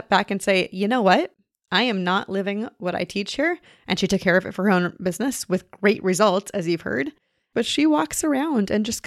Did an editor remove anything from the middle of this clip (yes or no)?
no